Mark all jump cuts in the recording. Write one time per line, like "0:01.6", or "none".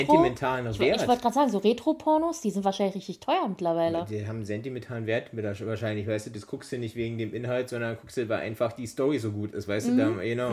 none